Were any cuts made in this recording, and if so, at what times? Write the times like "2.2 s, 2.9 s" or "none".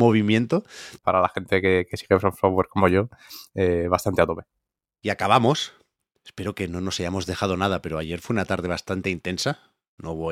1.0 s